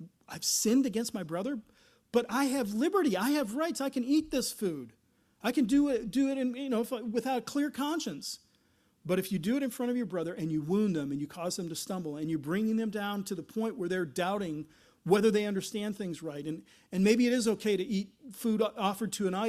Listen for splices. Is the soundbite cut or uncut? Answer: uncut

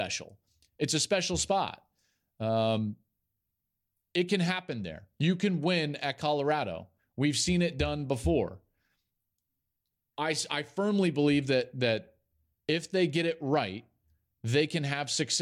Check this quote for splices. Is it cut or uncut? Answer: uncut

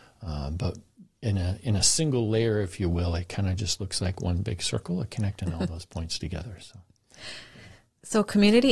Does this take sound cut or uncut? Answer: uncut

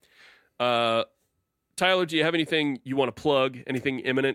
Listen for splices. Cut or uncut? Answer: uncut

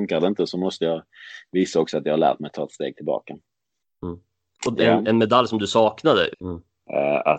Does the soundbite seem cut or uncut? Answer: cut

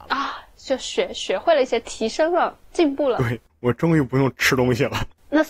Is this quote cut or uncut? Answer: uncut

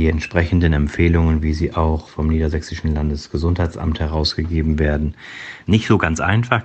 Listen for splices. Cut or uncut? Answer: uncut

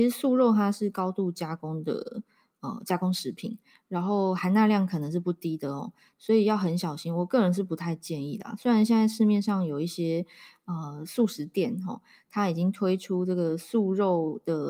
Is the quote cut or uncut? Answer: uncut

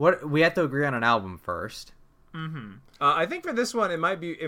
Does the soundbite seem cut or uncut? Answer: uncut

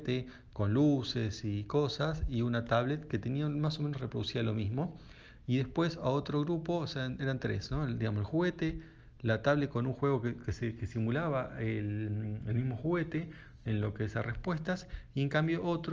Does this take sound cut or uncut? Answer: uncut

